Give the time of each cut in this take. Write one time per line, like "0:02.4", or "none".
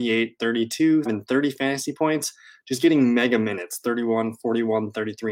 0:01.1